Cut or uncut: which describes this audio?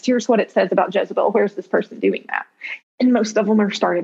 cut